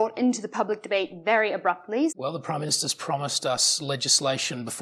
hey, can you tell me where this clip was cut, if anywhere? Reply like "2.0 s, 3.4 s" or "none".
2.1 s